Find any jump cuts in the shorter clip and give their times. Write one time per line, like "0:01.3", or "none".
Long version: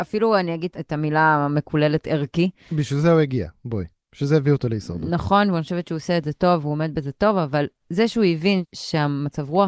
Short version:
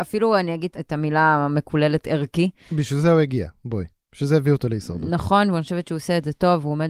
none